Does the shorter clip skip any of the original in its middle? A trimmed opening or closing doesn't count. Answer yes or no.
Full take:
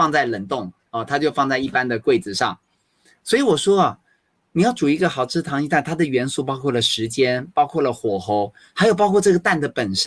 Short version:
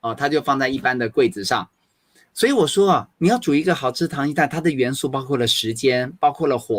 yes